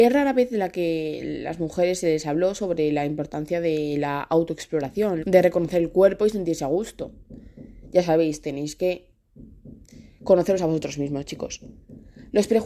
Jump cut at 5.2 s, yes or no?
yes